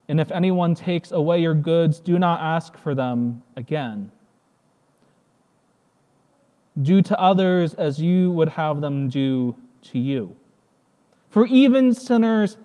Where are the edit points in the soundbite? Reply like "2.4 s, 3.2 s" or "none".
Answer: 11.2 s